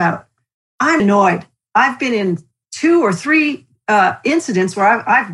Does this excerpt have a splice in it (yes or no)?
yes